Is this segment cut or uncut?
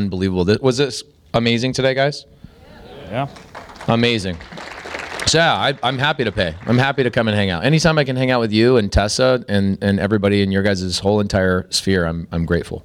uncut